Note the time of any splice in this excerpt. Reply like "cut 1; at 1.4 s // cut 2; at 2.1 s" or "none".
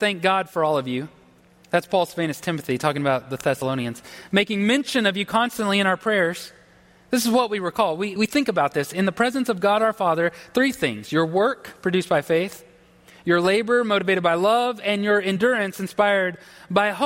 cut 1; at 8.2 s